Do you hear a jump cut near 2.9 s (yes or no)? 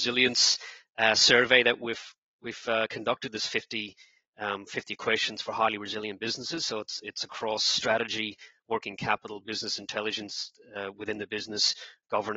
no